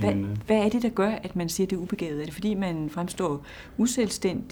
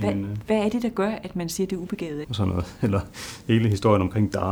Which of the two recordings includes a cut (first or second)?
second